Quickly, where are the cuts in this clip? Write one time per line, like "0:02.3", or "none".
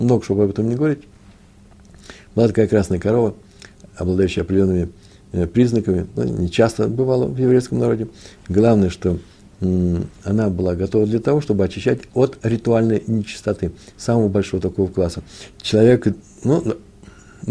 0:06.2
0:15.5